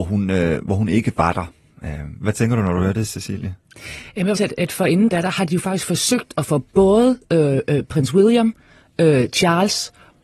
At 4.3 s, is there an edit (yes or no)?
yes